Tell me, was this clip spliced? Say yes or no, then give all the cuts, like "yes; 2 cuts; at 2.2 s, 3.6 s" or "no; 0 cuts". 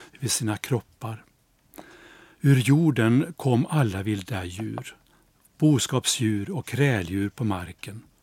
no; 0 cuts